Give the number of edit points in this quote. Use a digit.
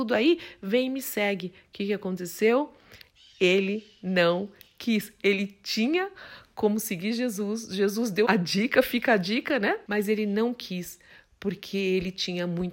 2